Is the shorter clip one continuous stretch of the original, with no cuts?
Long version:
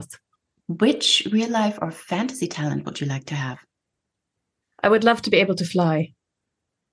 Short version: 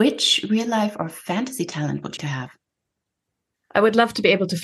no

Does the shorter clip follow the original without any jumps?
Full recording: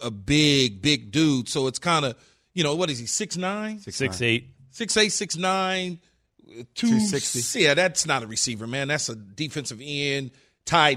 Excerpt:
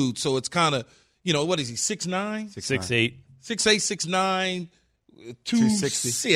yes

